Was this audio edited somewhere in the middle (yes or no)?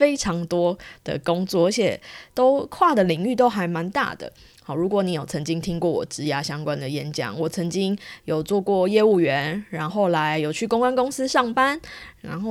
yes